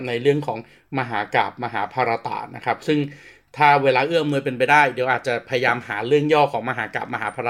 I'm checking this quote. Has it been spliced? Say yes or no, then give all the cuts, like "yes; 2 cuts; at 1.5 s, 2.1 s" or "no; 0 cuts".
no; 0 cuts